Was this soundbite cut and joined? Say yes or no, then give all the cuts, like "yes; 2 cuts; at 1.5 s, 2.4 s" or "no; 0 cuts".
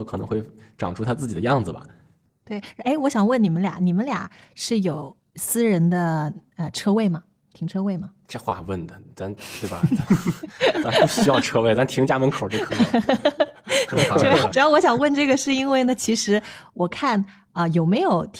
yes; 1 cut; at 14.5 s